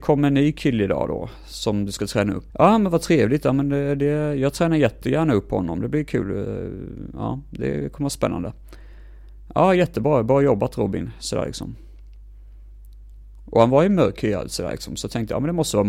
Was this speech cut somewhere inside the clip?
yes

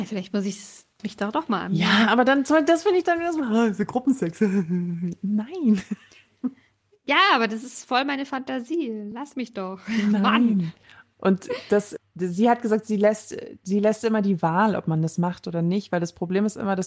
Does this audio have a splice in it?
no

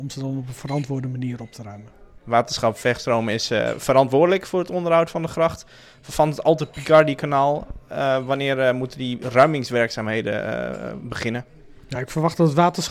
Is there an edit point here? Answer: no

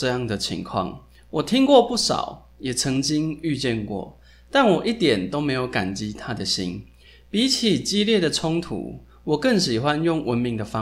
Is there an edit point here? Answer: no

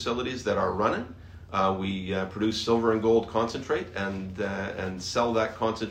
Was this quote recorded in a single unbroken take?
yes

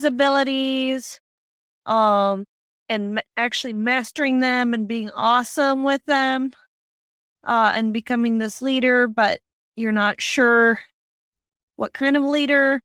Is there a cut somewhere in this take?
no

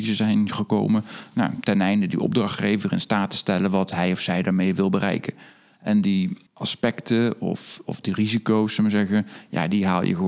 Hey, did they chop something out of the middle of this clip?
yes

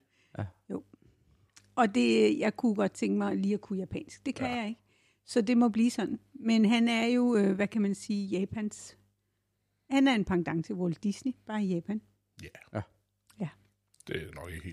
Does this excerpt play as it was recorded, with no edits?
yes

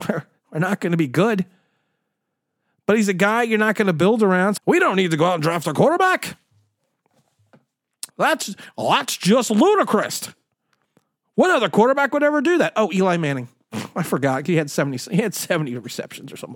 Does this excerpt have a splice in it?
yes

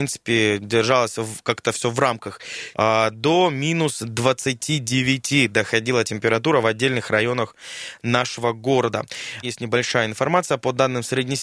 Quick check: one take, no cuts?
no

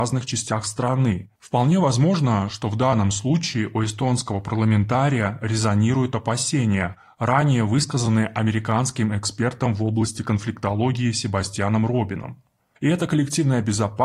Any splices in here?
yes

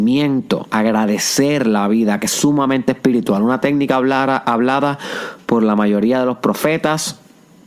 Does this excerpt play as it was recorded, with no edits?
yes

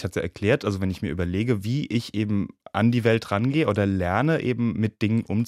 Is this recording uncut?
no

